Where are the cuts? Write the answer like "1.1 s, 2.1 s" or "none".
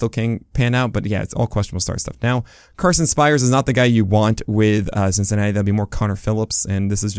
none